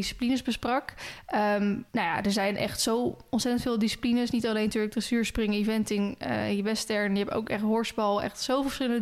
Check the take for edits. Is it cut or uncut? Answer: cut